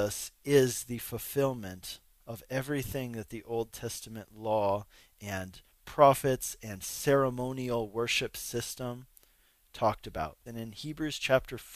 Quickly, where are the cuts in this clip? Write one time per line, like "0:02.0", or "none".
0:10.5